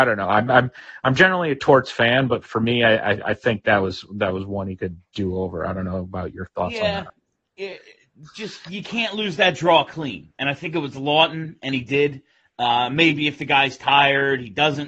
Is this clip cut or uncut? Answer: uncut